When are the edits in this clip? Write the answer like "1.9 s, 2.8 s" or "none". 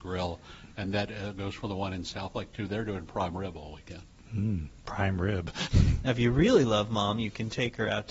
none